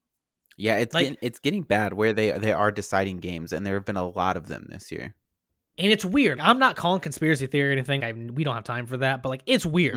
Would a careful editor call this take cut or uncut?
cut